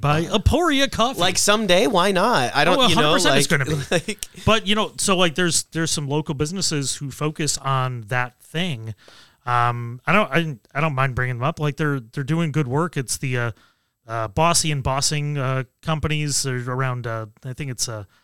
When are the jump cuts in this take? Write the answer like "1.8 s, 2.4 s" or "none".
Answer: none